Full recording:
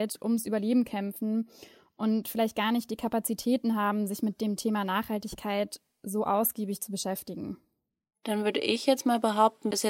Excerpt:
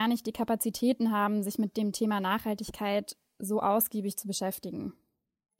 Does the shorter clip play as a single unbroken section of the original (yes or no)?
yes